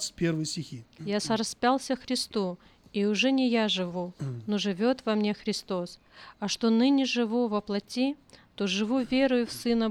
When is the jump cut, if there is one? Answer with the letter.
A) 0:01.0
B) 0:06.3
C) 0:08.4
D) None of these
A